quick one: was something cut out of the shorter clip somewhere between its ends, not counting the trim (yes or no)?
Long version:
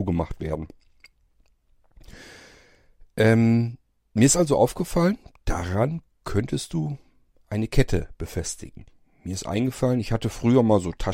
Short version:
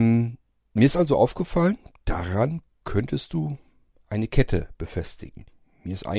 no